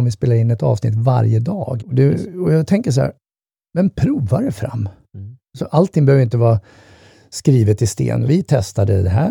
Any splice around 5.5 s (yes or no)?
no